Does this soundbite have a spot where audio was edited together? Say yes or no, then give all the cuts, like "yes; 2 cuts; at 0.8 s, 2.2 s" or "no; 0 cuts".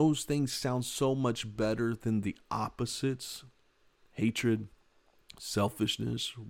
no; 0 cuts